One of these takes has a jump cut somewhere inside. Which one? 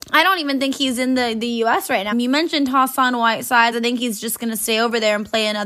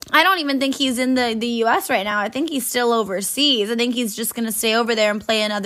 first; 2 cuts; at 2.1 s, 3.7 s

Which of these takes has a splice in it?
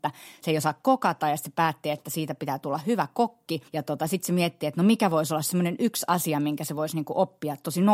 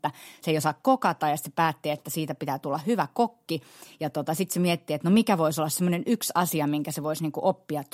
first; 1 cut; at 3.7 s

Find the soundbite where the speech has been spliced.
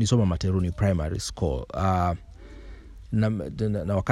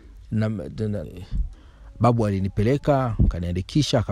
second; 1 cut; at 1.0 s

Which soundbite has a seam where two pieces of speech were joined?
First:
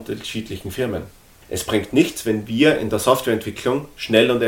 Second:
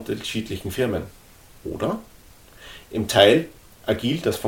first; 1 cut; at 1.4 s

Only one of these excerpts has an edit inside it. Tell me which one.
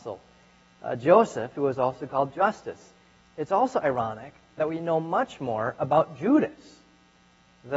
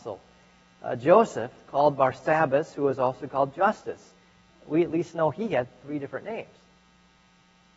first; 2 cuts; at 1.5 s, 3.2 s

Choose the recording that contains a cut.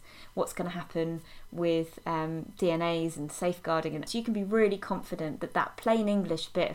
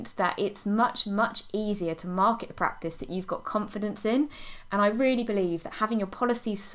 first; 1 cut; at 4.1 s

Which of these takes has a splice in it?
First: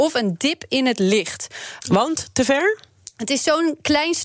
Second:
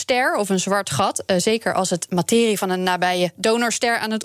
first; 1 cut; at 1.8 s

